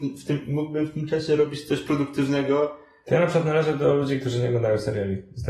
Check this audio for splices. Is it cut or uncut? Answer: uncut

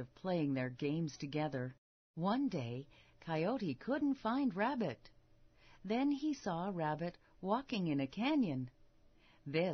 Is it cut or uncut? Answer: uncut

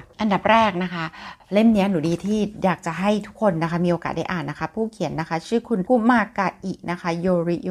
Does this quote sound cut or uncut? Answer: cut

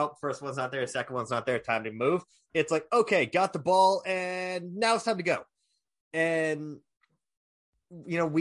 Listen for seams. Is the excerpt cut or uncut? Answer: uncut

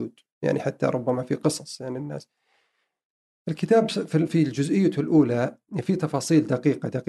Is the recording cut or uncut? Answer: uncut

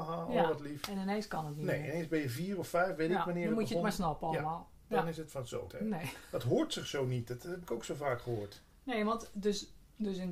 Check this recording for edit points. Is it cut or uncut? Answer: cut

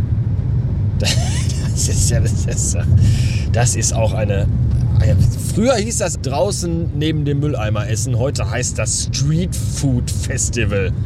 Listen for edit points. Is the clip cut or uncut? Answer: cut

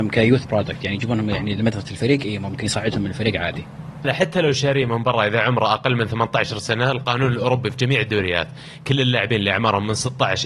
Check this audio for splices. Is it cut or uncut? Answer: cut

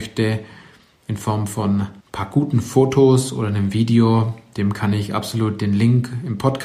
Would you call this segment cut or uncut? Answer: cut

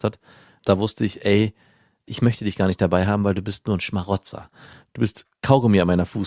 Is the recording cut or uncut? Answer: uncut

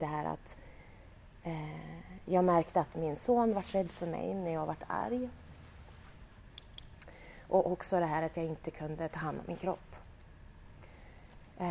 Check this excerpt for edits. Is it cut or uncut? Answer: uncut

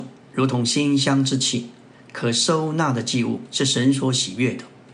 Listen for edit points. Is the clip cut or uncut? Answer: uncut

